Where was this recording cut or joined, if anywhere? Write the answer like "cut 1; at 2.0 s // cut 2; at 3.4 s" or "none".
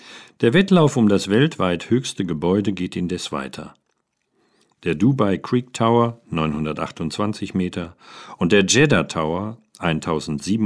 none